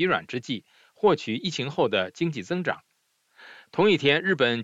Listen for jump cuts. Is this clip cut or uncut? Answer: uncut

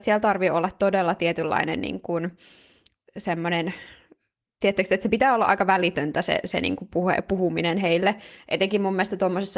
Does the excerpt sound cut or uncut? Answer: uncut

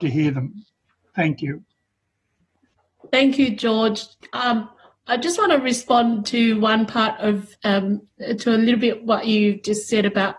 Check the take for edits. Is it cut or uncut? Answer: uncut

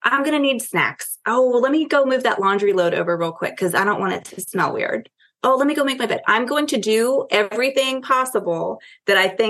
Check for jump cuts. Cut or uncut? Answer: uncut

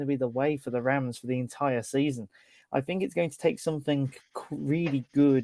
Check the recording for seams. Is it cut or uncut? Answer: uncut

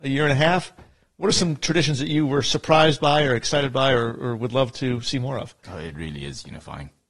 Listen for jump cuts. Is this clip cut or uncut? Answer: cut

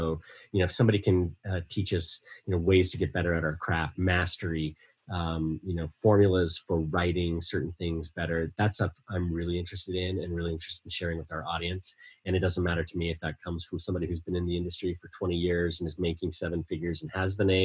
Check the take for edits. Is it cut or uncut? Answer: uncut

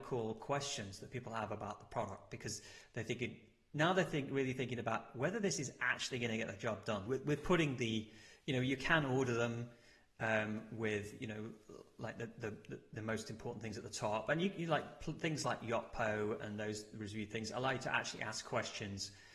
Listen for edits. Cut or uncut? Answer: cut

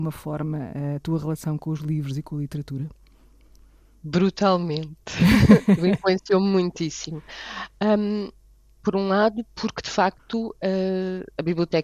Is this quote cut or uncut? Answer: uncut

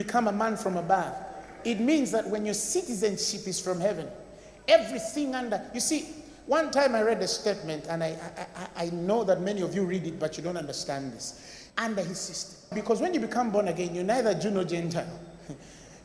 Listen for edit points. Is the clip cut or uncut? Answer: cut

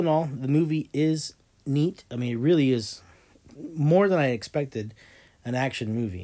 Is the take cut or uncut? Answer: cut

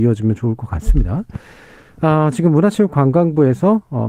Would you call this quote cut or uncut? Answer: uncut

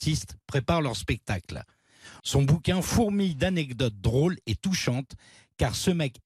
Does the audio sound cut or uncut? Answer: cut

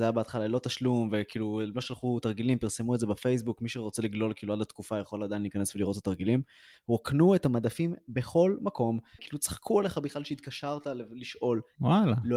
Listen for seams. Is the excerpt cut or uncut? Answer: cut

